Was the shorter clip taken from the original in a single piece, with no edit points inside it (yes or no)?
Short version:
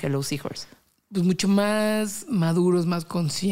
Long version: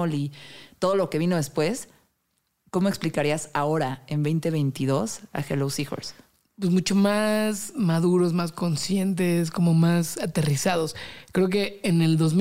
yes